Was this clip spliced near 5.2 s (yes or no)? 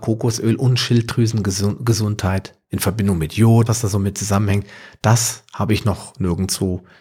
no